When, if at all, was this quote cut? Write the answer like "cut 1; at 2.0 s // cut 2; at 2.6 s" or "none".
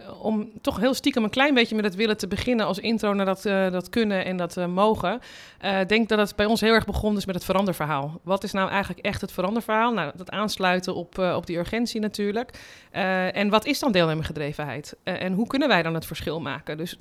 none